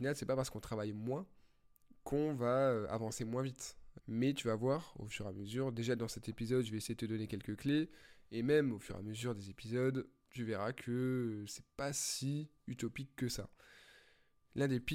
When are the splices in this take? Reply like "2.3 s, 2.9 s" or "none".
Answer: 4.0 s